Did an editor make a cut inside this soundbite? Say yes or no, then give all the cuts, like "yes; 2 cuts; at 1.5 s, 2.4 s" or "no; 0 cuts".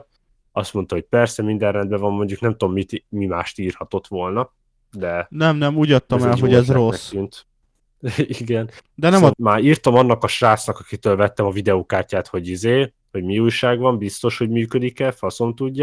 yes; 1 cut; at 9.3 s